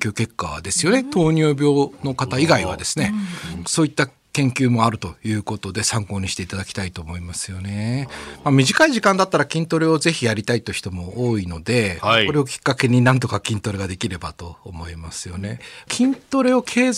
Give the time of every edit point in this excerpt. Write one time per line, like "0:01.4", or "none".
none